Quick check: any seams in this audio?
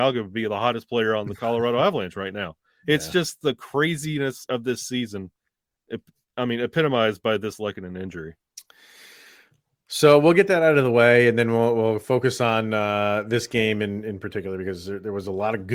no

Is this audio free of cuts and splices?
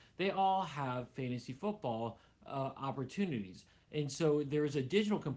yes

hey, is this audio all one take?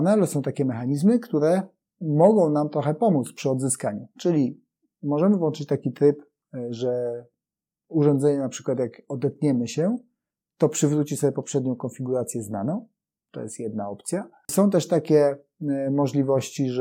yes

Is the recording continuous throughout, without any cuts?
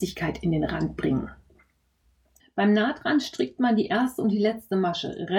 no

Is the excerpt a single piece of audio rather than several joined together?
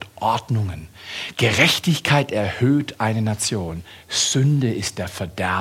yes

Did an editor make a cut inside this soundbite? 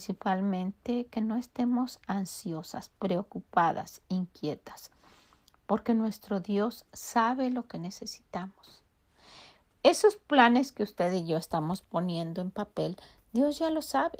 no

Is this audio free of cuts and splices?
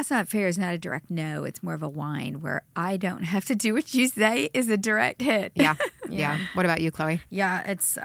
yes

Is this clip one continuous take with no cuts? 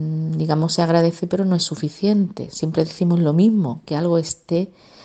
yes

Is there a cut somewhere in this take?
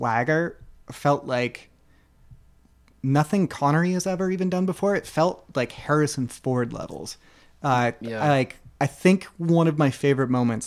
no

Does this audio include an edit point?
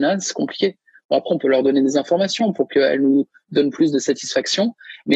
no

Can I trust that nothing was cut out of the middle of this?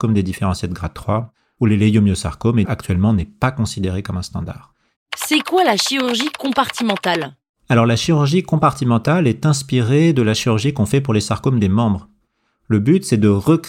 no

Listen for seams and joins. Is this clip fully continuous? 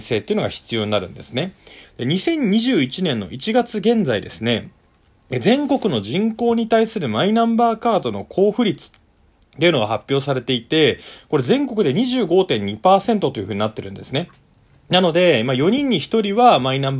no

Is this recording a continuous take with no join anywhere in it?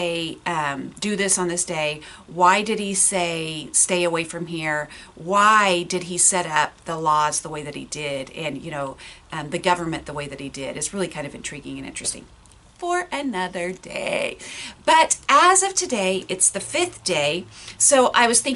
yes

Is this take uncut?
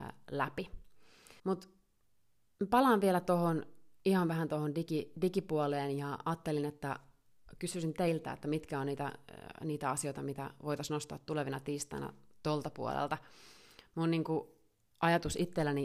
no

